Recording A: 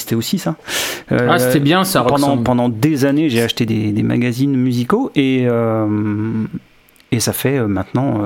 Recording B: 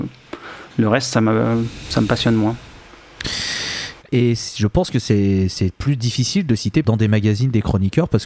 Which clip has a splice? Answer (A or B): B